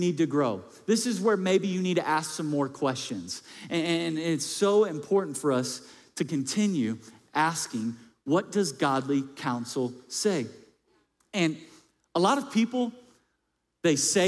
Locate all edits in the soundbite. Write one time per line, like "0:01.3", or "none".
none

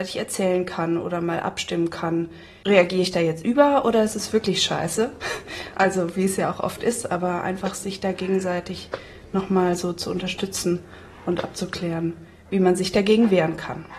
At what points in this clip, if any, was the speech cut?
none

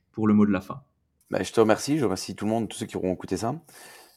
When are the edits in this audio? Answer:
none

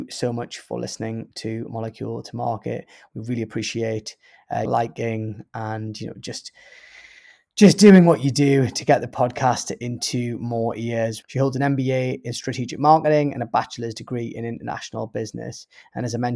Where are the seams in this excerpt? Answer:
0:04.7
0:11.2

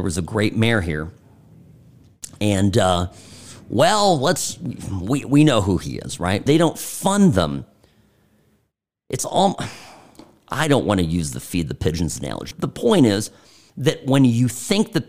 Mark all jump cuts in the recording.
0:06.5
0:12.5

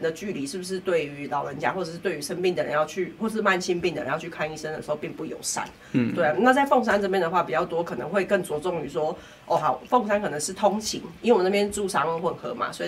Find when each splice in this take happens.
none

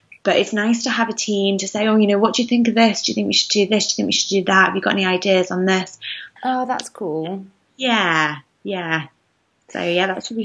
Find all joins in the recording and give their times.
0:06.4

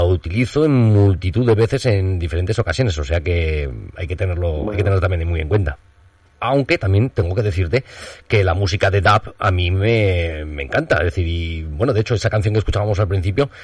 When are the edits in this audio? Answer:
0:06.3

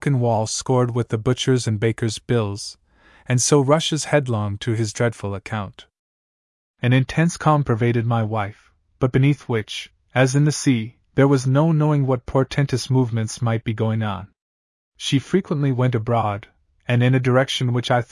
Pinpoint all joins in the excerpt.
0:06.7

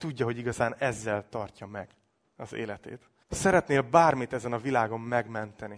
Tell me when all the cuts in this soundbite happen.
0:03.2

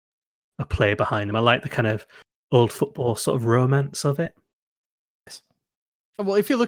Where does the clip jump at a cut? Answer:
none

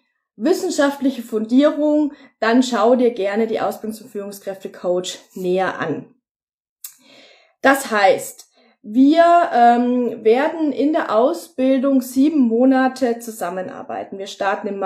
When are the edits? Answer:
none

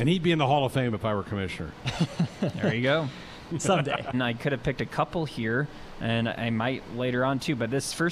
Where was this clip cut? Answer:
0:04.1

